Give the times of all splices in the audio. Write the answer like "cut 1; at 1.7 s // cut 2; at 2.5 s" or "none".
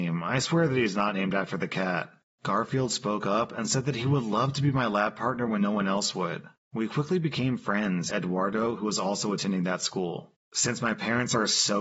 cut 1; at 8.1 s